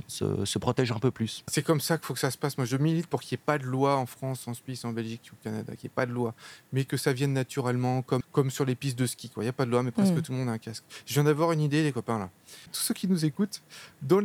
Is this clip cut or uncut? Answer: cut